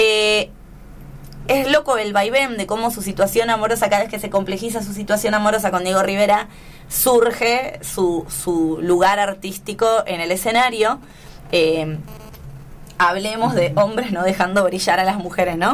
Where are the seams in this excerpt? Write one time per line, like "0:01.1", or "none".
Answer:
0:01.5